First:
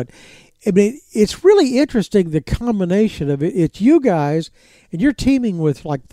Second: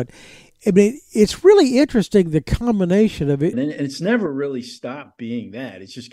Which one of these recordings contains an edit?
second; 1 cut; at 3.5 s

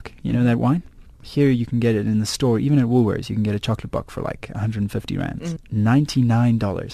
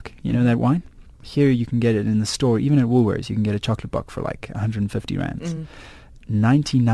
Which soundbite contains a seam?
first; 1 cut; at 5.6 s

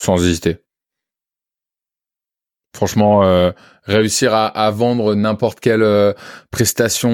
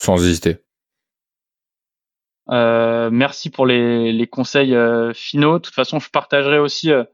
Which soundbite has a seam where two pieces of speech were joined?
second; 1 cut; at 2.5 s

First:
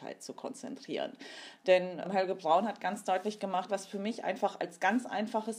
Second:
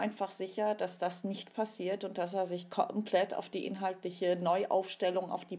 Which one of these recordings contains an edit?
first; 2 cuts; at 2.0 s, 3.7 s

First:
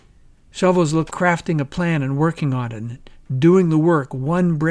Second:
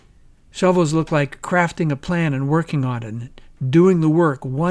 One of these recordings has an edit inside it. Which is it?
first; 1 cut; at 1.1 s

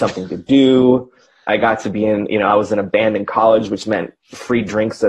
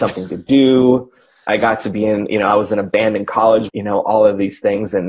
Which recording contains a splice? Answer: second; 1 cut; at 3.7 s

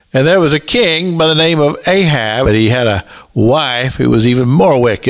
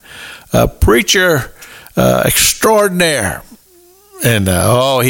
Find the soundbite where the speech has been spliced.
first; 1 cut; at 2.4 s

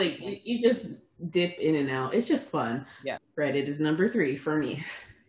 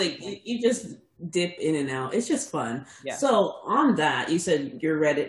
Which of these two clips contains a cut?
first; 1 cut; at 3.2 s

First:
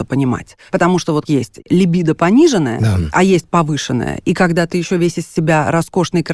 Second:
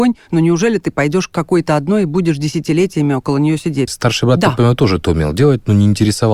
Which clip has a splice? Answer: second; 1 cut; at 3.9 s

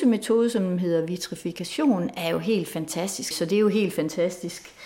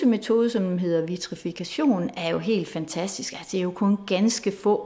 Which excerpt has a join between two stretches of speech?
first; 1 cut; at 3.3 s

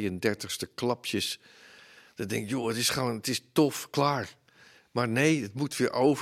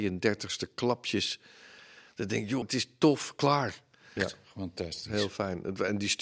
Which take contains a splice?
second; 2 cuts; at 2.6 s, 4.2 s

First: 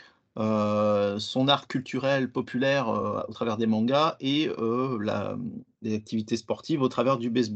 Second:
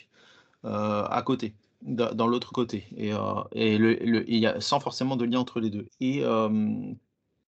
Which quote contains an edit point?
second; 1 cut; at 5.8 s

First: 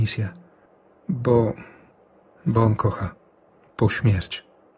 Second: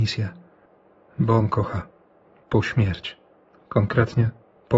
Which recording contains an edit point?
second; 1 cut; at 1.0 s

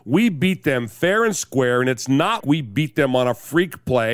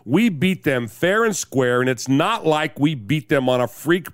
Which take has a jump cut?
first; 1 cut; at 2.4 s

